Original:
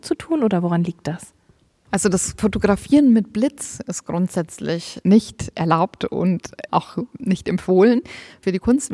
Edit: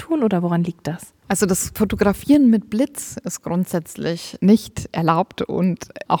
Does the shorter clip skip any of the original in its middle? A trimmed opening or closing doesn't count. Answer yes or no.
yes